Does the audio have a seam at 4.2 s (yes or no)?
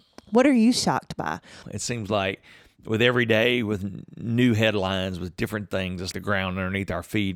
no